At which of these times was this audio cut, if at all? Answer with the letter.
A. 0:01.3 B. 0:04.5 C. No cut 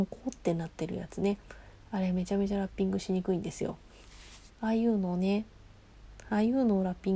B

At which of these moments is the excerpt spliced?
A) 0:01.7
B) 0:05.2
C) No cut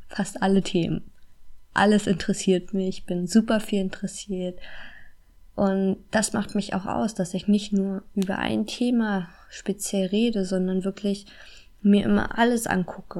C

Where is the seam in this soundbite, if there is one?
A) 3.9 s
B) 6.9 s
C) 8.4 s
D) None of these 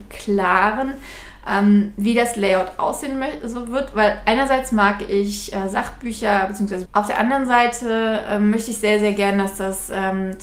B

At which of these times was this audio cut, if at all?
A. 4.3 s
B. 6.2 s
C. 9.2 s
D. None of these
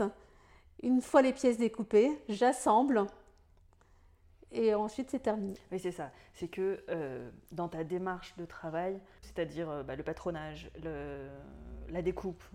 C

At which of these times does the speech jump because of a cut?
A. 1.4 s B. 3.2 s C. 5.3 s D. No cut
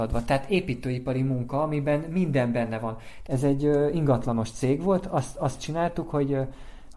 B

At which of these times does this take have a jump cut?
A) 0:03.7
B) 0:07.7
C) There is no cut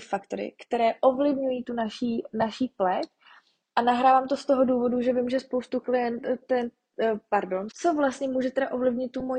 B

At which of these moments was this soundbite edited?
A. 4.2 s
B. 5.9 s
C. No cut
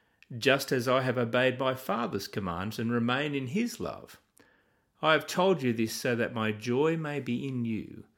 C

